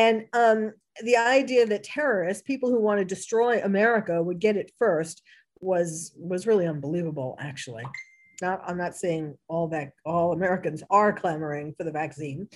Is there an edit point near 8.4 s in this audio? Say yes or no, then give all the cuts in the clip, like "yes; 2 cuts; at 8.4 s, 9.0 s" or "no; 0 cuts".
yes; 1 cut; at 8.4 s